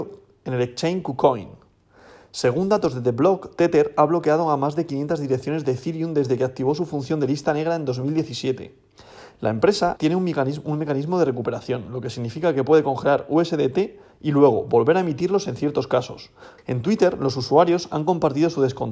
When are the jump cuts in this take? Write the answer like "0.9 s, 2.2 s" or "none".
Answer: 10.0 s, 16.6 s